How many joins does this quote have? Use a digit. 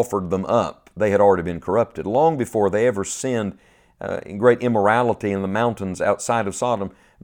0